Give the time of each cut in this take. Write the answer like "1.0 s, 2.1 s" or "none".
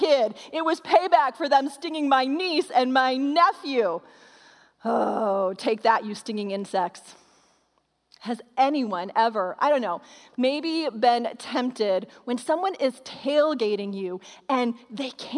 none